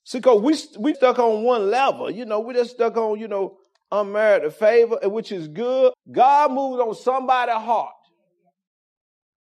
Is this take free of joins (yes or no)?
no